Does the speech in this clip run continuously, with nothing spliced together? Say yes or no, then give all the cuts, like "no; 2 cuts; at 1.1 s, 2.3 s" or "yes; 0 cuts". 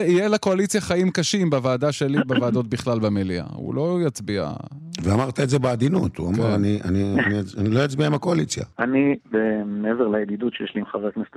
no; 1 cut; at 8.7 s